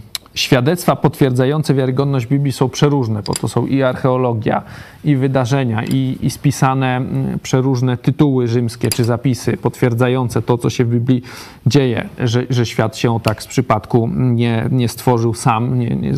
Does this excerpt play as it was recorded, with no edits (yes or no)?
no